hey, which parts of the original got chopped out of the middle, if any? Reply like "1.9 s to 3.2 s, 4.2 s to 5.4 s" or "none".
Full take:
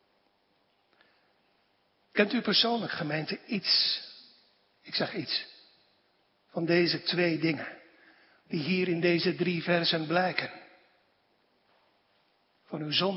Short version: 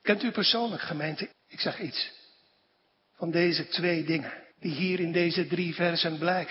3.4 s to 4.7 s, 7.9 s to 8.4 s